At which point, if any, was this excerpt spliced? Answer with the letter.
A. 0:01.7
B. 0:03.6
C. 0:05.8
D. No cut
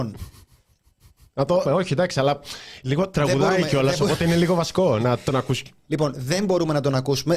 A